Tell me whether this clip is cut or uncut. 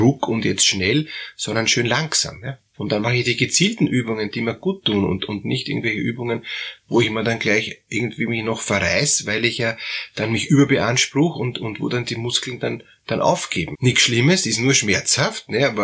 cut